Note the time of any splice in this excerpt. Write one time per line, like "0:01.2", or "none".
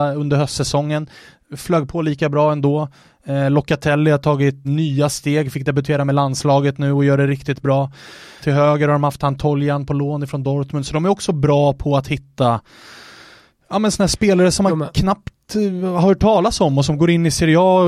0:04.6
0:08.4